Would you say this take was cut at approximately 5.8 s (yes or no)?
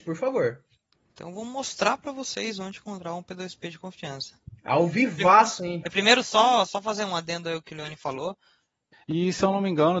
yes